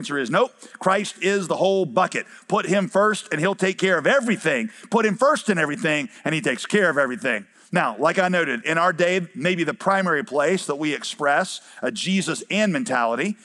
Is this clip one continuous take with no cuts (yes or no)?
yes